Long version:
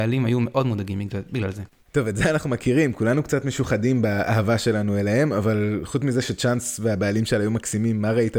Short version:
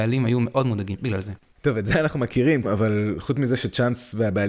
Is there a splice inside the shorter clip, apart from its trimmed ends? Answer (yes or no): yes